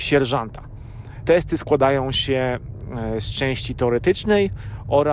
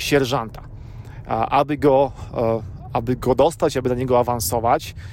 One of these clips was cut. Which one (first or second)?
first